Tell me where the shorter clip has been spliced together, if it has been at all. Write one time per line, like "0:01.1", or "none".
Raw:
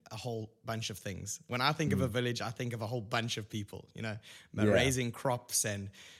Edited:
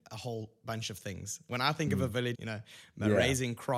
0:02.3